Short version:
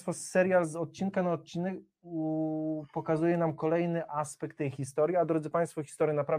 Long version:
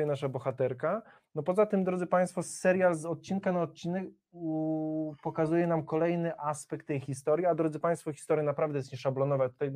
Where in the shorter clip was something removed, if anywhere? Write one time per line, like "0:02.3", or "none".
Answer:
none